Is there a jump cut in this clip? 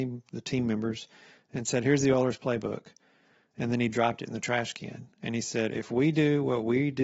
no; 0 cuts

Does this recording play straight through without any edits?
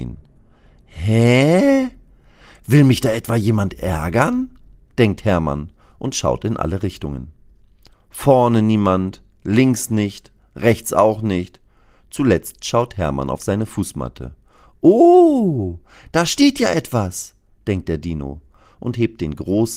yes; 0 cuts

